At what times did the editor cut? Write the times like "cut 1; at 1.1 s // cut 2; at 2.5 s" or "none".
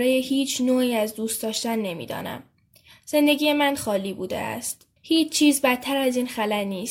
cut 1; at 3.8 s // cut 2; at 5.0 s